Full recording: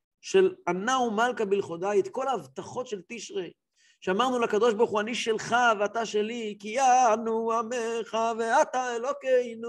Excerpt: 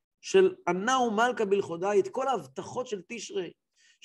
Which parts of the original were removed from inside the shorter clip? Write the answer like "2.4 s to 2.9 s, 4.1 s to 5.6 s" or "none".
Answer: none